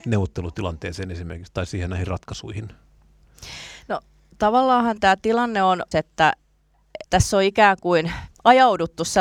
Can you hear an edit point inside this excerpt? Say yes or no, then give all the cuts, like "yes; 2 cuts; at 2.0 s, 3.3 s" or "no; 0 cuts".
yes; 2 cuts; at 5.9 s, 7.0 s